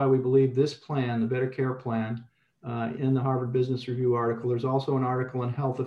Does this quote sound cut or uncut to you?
cut